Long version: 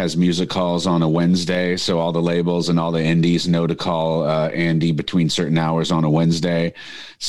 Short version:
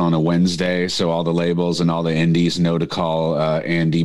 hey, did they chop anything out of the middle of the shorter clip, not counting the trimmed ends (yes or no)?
no